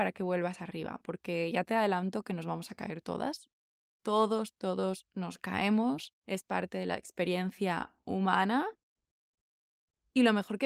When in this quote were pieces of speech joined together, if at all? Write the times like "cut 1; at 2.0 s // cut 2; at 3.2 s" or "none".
cut 1; at 3.9 s // cut 2; at 6.2 s